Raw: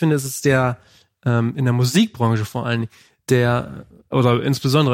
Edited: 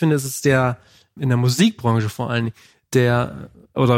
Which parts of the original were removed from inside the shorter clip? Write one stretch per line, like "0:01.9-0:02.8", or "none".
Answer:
0:01.2-0:01.5

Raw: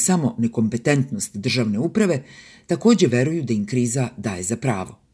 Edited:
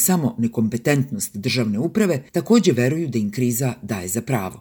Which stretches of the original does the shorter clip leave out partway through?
0:02.3-0:02.6

